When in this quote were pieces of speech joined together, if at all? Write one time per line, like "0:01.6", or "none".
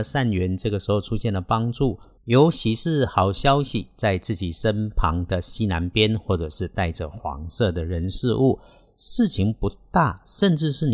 0:02.2